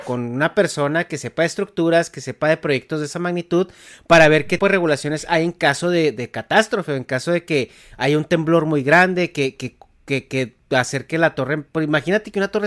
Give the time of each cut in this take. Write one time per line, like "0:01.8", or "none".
0:04.6